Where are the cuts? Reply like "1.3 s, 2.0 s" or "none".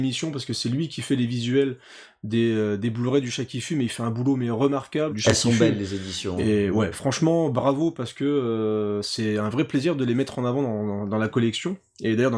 5.1 s